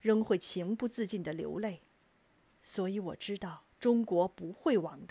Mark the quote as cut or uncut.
cut